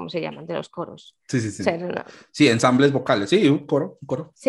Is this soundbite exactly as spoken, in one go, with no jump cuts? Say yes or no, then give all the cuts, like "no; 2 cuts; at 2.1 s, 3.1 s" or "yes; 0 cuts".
yes; 0 cuts